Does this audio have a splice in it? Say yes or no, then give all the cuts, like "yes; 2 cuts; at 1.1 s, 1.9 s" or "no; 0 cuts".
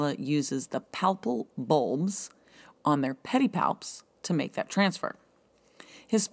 yes; 1 cut; at 2.7 s